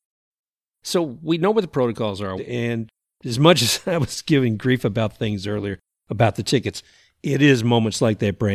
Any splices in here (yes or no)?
yes